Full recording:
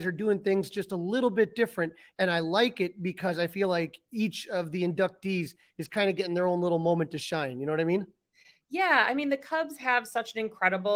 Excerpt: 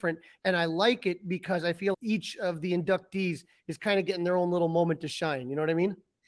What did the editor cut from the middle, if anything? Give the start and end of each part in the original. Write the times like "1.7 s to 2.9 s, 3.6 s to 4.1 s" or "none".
3.7 s to 4.0 s